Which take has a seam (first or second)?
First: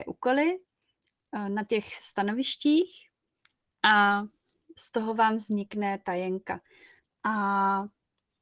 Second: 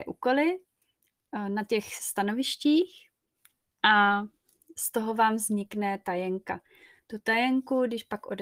first